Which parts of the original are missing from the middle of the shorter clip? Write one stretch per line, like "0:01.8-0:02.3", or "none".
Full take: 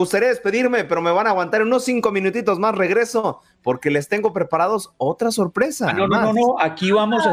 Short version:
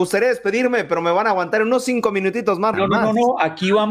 0:02.7-0:05.9